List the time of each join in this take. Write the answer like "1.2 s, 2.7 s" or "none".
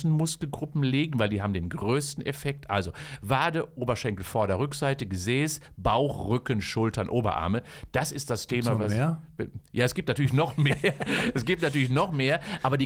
none